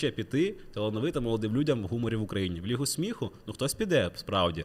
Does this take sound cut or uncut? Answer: uncut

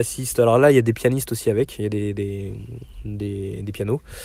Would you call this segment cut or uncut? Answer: uncut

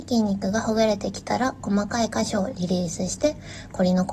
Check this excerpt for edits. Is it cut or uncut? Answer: uncut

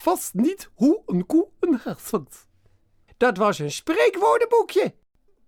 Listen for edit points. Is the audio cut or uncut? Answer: cut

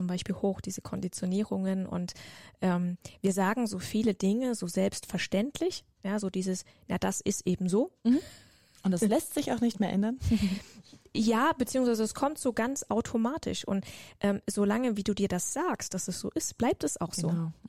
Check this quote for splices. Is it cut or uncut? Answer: uncut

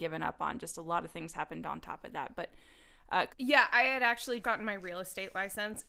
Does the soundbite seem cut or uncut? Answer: cut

